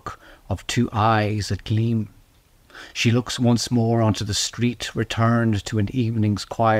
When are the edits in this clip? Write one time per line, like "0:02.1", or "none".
none